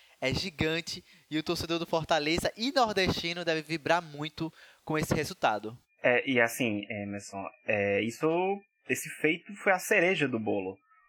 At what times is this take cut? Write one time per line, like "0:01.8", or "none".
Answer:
none